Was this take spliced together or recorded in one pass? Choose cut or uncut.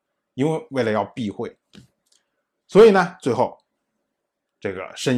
uncut